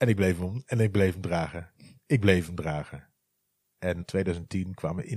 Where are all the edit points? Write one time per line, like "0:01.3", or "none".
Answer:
0:04.0

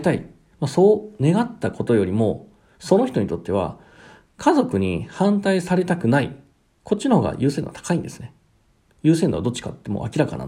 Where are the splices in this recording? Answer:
0:08.8

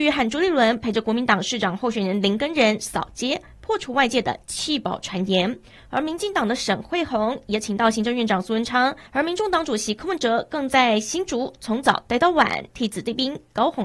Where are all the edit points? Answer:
0:09.1

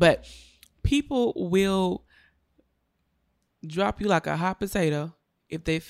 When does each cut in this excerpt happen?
none

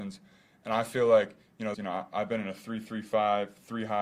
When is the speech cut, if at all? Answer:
0:01.7

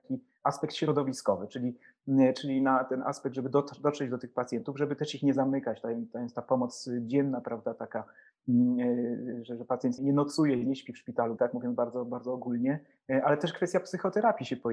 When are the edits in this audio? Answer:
0:10.0
0:11.4

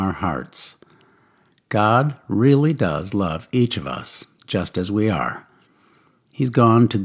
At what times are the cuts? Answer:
none

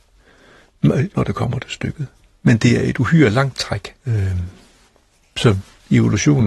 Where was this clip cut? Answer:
0:01.1
0:04.0

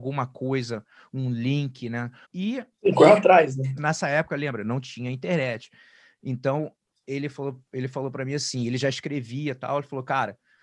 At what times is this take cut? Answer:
0:02.2
0:03.8

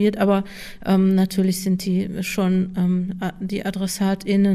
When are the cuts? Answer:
none

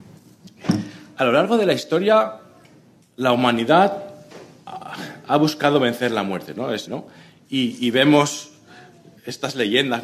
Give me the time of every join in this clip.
0:06.9

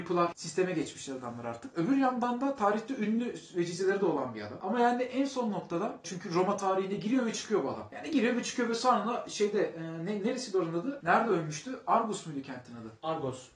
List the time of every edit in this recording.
none

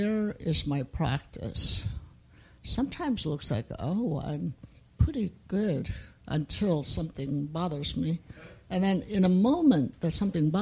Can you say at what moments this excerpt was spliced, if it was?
none

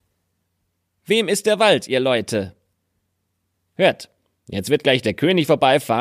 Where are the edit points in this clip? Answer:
0:03.5

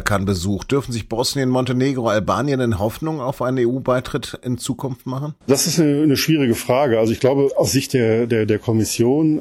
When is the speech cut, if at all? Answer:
0:05.4

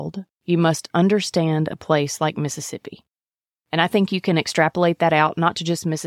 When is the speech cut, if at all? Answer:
none

